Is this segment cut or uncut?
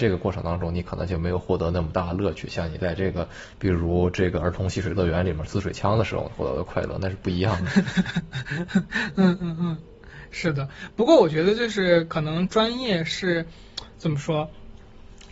uncut